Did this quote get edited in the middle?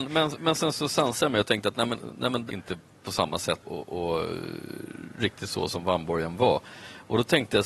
yes; 2 cuts; at 2.5 s, 3.6 s

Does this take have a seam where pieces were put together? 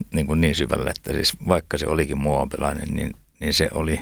no; 0 cuts

